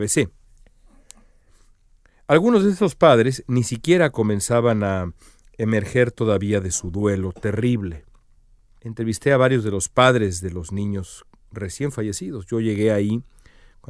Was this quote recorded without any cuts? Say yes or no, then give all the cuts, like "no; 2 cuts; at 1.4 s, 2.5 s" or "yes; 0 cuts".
no; 1 cut; at 8.8 s